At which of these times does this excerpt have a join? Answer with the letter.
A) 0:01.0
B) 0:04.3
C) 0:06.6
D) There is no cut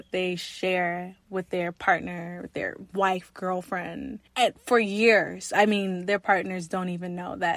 B